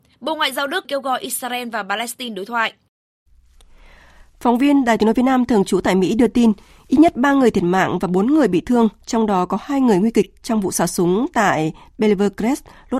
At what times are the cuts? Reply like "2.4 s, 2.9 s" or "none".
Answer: none